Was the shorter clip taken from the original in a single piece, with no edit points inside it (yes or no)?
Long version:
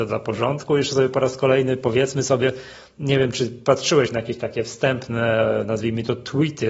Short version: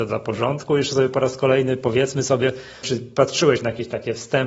no